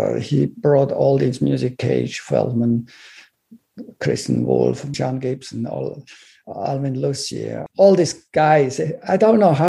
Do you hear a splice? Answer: yes; 2 cuts; at 4.9 s, 7.7 s

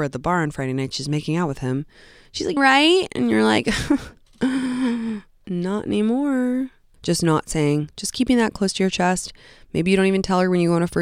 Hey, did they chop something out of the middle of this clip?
yes; 2 cuts; at 2.6 s, 6.9 s

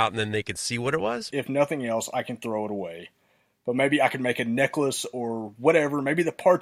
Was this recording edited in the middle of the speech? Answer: yes; 1 cut; at 1.3 s

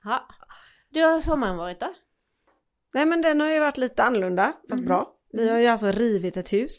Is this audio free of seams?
yes; 0 cuts

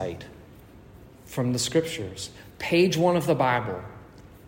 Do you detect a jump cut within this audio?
no; 0 cuts

